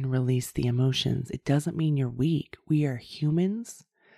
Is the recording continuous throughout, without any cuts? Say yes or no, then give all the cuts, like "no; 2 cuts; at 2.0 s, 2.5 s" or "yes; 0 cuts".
yes; 0 cuts